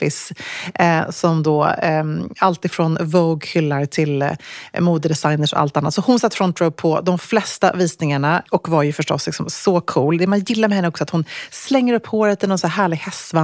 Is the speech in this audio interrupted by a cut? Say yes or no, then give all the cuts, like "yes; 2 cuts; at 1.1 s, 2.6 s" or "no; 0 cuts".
yes; 1 cut; at 8.5 s